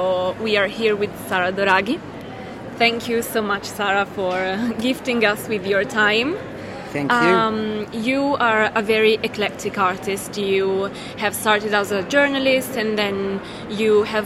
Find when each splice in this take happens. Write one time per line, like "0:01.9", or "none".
none